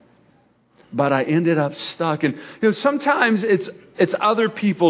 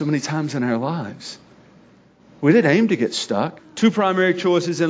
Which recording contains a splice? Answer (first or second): second